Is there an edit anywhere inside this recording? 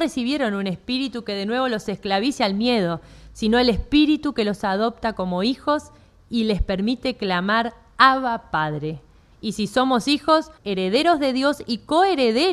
yes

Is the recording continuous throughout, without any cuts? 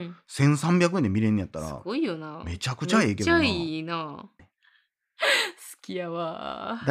no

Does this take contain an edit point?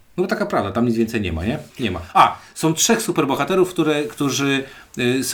yes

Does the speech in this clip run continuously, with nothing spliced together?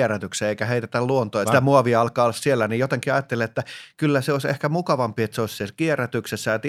no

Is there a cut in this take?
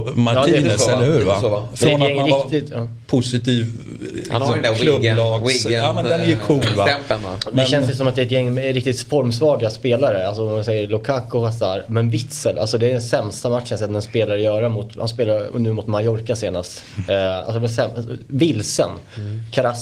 no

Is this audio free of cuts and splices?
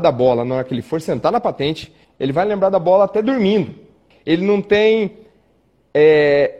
no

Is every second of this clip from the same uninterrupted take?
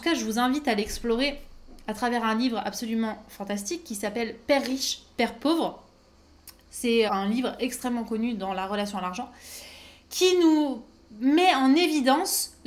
no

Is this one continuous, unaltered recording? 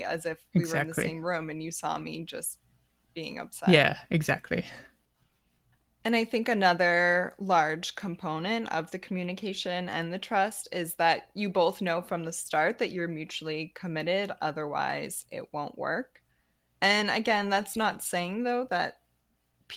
yes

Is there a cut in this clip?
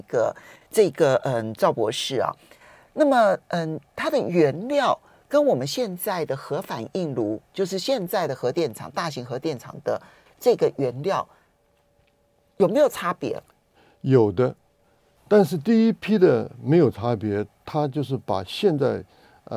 no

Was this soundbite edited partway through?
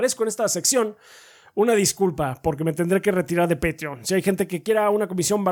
no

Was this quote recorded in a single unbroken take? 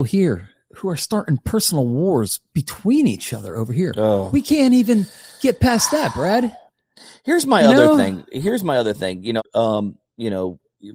no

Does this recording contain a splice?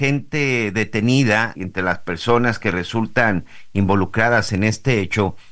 yes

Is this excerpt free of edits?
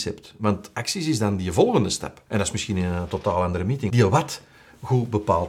no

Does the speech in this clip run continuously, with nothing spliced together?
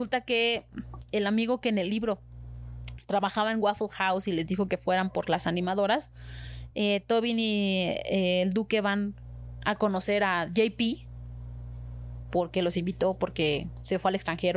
no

